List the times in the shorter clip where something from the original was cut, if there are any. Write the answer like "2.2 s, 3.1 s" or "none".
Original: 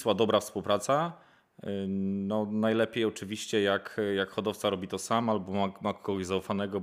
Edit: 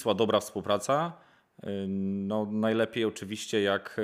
none

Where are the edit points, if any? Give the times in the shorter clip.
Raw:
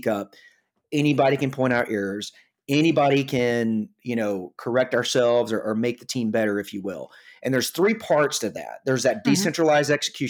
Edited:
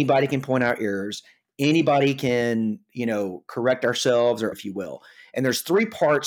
4.5 s

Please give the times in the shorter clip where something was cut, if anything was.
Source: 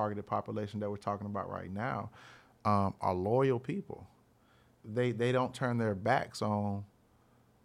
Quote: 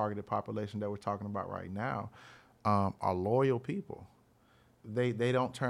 none

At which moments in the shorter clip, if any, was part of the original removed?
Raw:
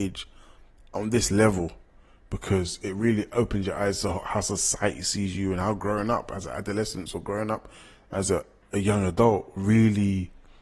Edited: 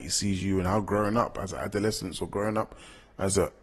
none

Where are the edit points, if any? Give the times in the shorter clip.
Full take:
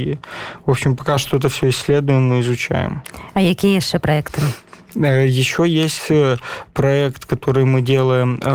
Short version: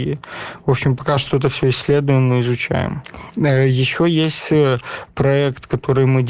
3.3 s

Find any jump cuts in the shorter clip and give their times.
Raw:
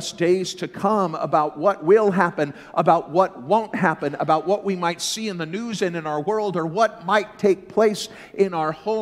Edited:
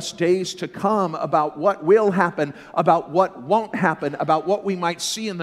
none

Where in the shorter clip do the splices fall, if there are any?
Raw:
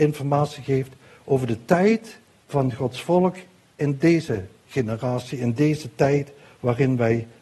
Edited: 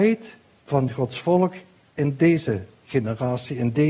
none

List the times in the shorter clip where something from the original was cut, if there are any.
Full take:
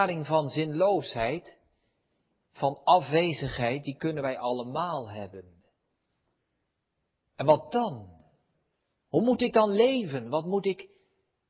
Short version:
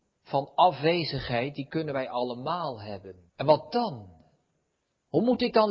3.3 s

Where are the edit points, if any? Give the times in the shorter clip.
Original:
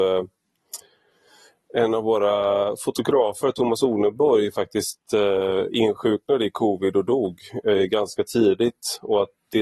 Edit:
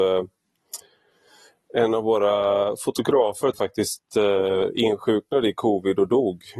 3.5 s

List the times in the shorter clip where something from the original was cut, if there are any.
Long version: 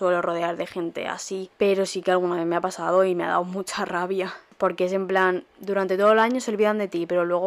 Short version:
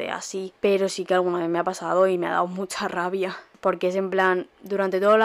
none

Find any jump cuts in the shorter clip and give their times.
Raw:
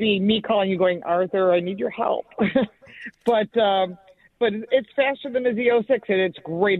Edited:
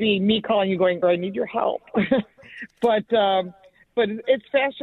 1.0 s

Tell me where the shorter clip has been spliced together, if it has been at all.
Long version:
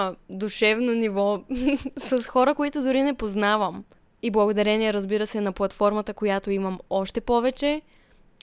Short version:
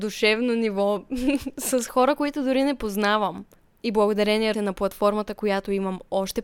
4.5 s

